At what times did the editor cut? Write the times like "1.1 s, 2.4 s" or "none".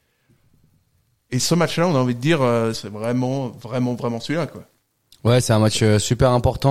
2.7 s